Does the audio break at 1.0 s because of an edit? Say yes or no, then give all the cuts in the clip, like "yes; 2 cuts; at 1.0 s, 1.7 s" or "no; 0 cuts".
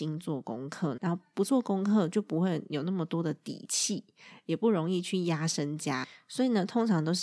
yes; 1 cut; at 1.0 s